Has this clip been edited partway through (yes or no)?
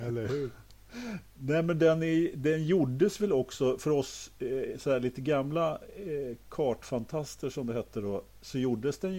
no